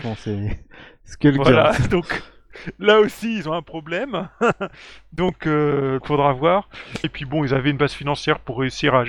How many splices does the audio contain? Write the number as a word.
two